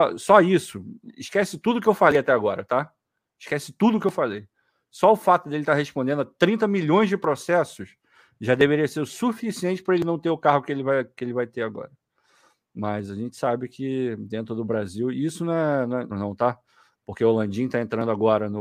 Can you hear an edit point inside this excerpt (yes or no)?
yes